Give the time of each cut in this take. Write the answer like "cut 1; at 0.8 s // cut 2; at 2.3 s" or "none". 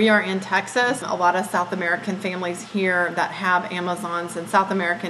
cut 1; at 1.0 s